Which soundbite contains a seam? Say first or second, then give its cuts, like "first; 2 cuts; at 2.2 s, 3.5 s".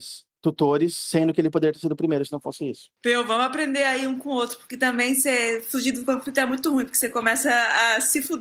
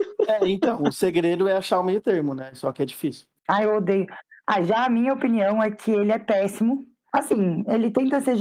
second; 1 cut; at 3.4 s